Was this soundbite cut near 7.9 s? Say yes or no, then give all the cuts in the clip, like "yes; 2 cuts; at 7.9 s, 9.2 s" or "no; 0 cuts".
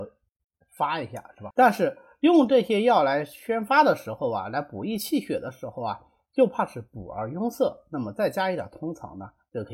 no; 1 cut; at 1.5 s